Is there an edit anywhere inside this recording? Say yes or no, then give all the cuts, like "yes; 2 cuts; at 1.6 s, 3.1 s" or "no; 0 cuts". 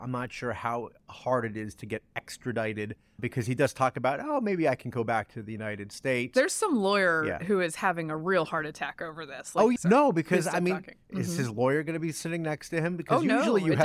yes; 2 cuts; at 9.8 s, 11.1 s